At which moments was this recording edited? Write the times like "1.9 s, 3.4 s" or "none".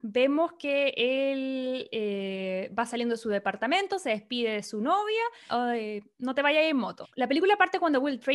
5.5 s, 7.0 s